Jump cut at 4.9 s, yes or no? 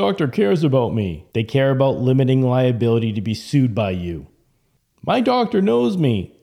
no